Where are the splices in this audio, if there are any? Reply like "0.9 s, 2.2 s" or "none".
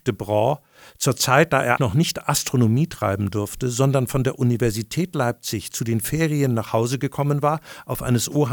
1.8 s